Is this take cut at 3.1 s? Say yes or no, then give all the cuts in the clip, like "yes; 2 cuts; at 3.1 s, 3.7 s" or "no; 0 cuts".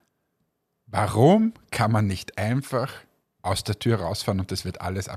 no; 0 cuts